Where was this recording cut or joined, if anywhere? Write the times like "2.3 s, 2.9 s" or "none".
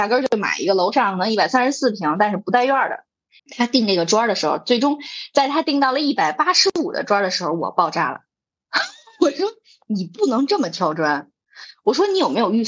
3.4 s